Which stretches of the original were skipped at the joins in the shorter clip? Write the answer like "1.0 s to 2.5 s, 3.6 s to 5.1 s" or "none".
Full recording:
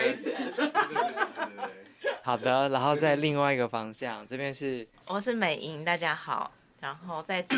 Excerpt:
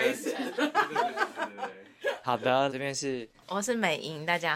2.7 s to 4.3 s